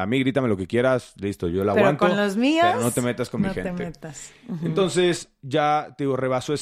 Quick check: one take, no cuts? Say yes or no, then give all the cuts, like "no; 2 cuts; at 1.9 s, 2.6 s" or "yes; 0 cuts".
yes; 0 cuts